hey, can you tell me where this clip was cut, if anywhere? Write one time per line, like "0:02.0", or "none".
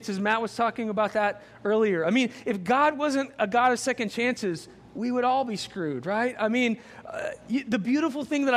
none